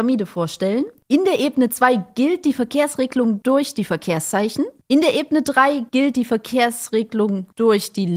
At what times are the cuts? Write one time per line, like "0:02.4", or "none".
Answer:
0:01.0